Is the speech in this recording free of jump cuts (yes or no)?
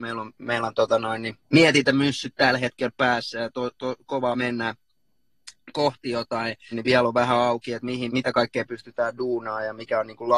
no